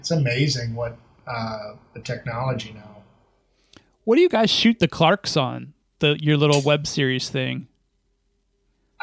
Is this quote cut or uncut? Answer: uncut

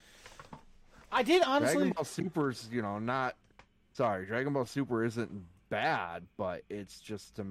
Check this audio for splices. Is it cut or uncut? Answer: uncut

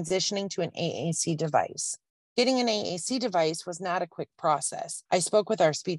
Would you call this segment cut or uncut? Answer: cut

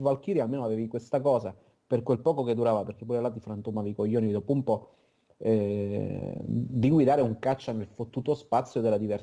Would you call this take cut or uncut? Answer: uncut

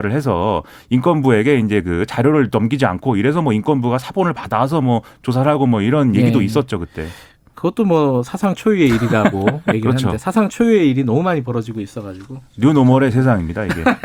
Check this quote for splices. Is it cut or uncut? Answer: uncut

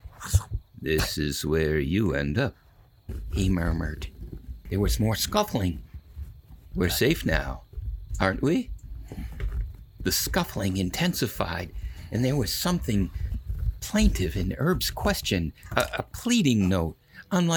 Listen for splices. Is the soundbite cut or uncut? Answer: cut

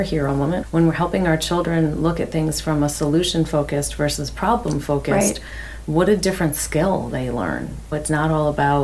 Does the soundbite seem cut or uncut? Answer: uncut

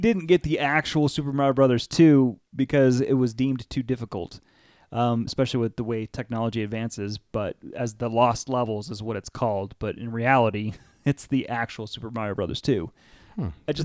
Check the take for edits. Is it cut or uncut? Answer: cut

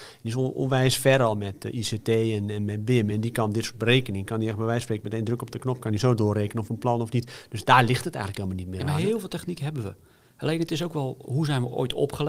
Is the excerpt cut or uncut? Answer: uncut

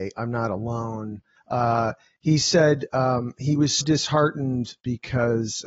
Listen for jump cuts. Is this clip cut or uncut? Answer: cut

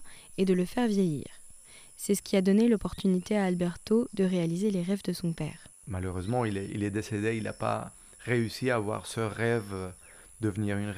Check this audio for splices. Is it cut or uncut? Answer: uncut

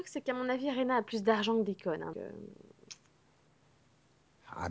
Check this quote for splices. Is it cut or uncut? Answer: cut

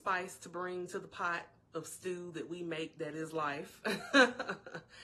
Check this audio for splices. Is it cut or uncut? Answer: uncut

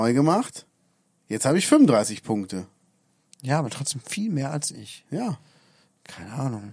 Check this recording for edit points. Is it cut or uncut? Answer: uncut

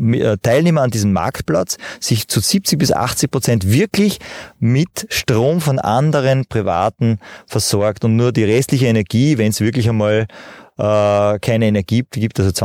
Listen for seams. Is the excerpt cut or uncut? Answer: uncut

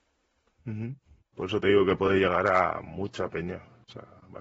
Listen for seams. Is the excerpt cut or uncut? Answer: cut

